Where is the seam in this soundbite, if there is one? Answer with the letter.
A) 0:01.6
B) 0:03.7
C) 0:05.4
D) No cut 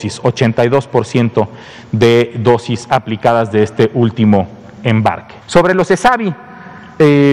C